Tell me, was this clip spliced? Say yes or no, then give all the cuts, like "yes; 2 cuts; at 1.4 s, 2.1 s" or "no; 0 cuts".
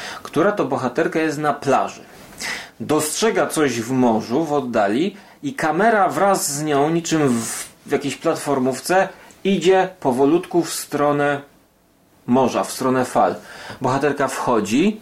no; 0 cuts